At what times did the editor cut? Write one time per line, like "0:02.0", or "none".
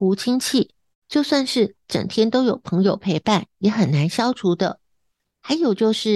0:00.9